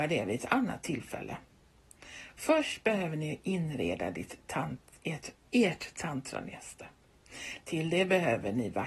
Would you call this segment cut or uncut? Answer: uncut